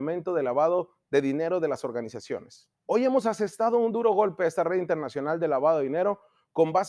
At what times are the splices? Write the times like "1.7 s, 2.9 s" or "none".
2.7 s